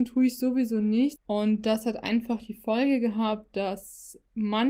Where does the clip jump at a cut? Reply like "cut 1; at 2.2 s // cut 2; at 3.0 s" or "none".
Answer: cut 1; at 1.2 s